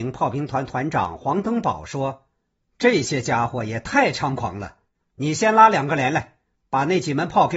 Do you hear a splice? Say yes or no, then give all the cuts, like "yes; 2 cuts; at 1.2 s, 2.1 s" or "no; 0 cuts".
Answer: no; 0 cuts